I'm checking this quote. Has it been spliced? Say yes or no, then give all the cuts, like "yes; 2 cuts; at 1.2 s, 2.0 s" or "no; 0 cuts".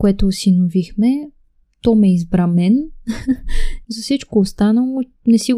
yes; 2 cuts; at 1.6 s, 3.8 s